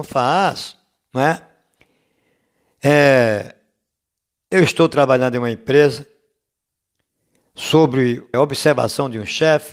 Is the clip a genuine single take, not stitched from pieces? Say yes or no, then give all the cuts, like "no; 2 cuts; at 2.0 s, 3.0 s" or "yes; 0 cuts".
no; 1 cut; at 8.3 s